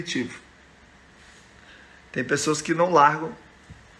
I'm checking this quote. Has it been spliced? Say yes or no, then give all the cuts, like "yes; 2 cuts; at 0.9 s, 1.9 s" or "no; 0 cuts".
no; 0 cuts